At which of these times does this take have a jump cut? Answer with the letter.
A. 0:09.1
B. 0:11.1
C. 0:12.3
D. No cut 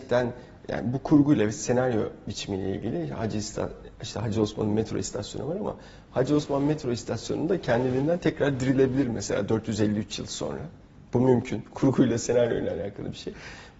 D